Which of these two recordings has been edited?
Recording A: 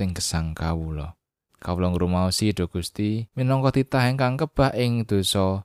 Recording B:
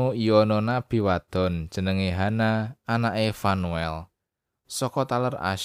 A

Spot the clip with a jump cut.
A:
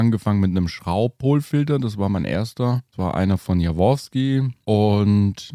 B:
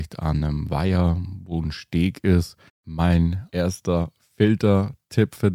B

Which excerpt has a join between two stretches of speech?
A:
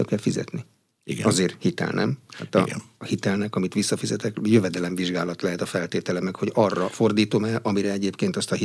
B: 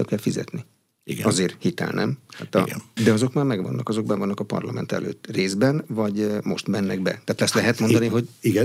B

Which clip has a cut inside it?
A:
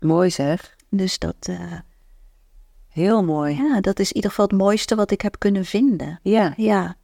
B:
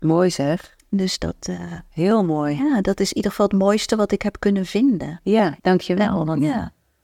B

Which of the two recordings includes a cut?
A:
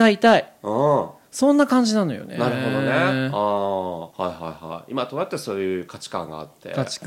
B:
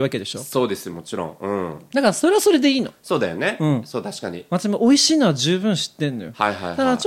A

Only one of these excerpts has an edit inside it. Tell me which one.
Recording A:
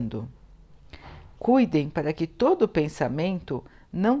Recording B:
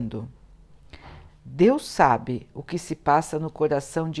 B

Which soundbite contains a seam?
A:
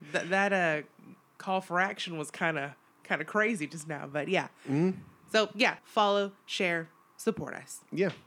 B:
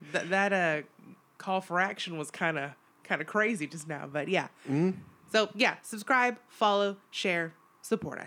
A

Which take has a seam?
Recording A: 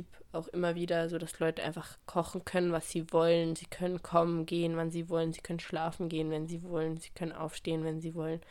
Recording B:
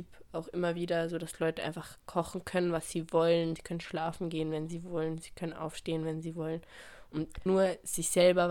B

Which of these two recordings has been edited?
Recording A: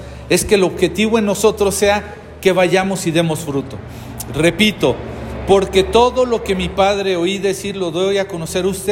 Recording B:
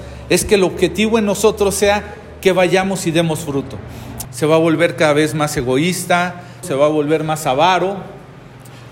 B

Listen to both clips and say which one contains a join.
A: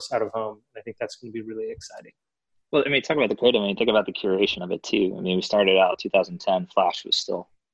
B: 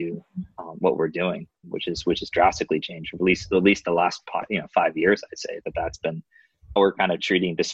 B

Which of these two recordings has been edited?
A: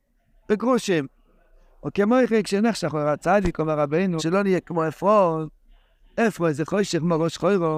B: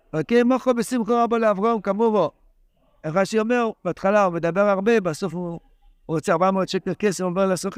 A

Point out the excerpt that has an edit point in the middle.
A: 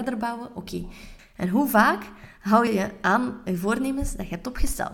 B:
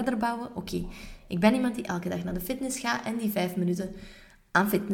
A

